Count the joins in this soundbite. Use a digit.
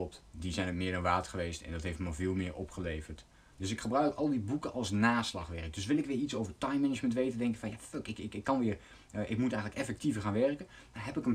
1